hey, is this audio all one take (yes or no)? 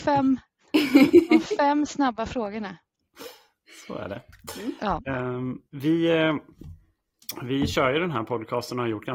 no